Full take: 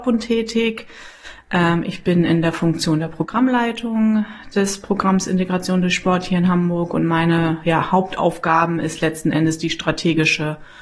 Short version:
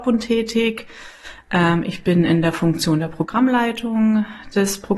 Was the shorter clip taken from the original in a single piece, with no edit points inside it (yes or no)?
yes